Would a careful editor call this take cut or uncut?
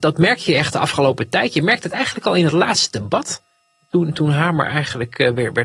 uncut